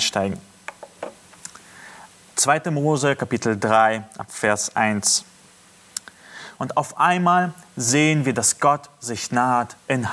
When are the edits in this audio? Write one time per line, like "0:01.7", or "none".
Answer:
0:06.6